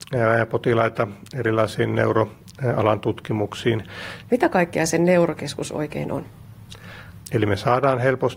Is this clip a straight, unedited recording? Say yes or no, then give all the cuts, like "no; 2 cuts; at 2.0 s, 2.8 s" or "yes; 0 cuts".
no; 2 cuts; at 4.3 s, 7.2 s